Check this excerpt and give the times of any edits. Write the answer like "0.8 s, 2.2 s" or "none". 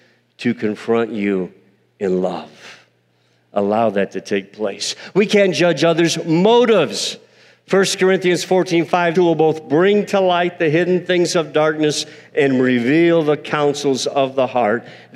9.1 s